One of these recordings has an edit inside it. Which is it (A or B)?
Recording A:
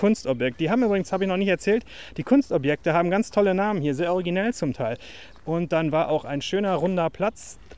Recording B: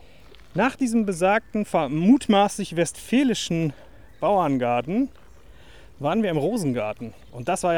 A